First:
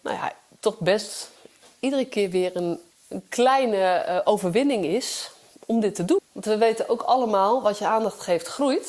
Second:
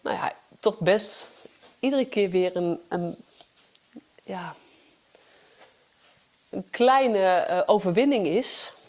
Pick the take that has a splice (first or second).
first